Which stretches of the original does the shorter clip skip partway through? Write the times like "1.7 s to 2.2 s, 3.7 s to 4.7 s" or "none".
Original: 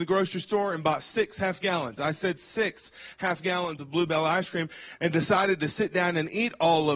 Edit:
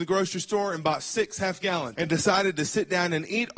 1.9 s to 5.0 s